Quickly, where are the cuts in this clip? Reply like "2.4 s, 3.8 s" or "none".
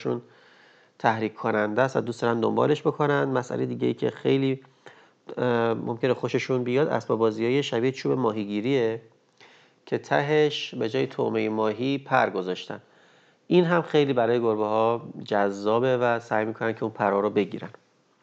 none